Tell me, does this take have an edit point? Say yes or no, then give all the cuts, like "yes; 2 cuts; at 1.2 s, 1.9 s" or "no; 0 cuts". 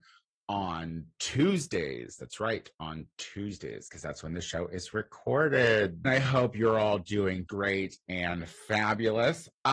yes; 2 cuts; at 6.0 s, 7.5 s